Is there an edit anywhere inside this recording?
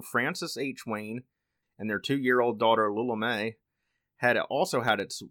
yes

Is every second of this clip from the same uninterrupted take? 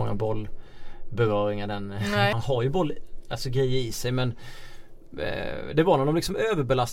no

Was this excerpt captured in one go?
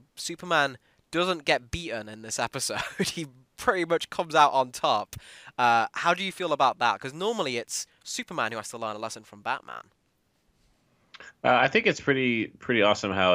yes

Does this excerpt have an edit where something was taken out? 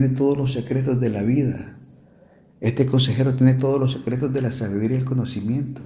no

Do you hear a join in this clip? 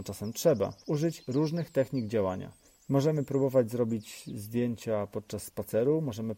no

